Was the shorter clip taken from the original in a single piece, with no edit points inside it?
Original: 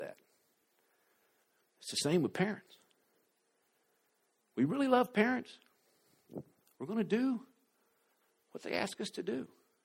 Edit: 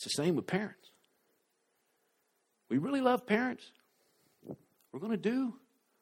yes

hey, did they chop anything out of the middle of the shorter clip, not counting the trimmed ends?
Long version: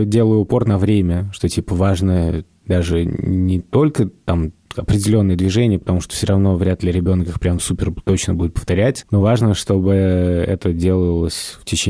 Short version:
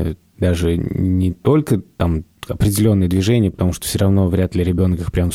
no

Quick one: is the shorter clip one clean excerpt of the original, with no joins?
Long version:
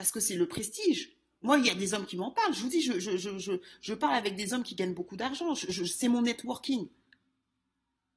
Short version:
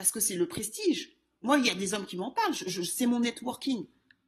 no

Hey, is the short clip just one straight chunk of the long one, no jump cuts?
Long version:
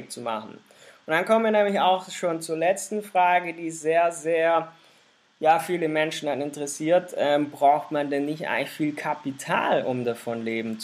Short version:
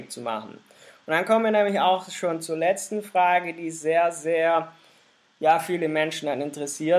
yes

